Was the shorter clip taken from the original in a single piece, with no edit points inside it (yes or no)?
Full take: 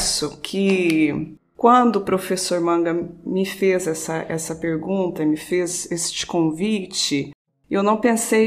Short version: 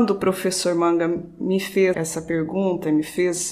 no